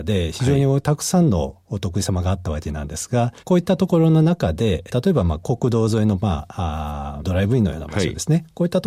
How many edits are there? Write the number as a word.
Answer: two